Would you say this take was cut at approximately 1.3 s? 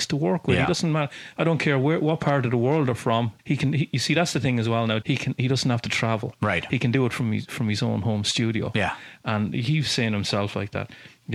no; 2 cuts; at 3.4 s, 5.0 s

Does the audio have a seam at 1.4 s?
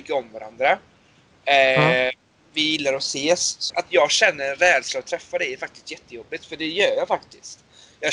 no; 1 cut; at 3.7 s

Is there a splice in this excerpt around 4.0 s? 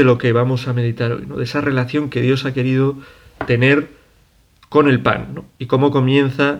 no; 0 cuts

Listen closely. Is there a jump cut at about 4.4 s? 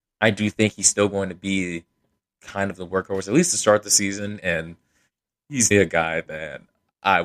yes; 2 cuts; at 4.4 s, 5.7 s

